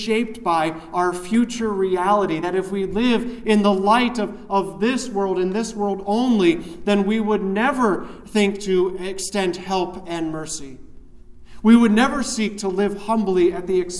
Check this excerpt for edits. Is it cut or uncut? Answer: uncut